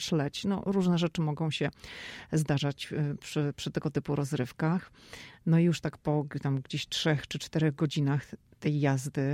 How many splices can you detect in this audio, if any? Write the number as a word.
zero